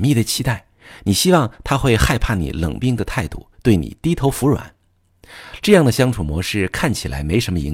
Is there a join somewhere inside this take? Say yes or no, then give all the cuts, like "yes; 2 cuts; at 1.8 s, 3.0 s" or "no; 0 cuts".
yes; 2 cuts; at 2.8 s, 5.6 s